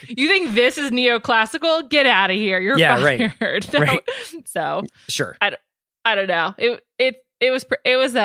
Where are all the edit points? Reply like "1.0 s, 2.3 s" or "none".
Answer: 4.4 s